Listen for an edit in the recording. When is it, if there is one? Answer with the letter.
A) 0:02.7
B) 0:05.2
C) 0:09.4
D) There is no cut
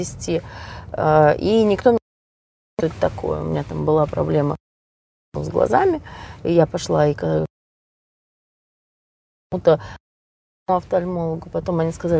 D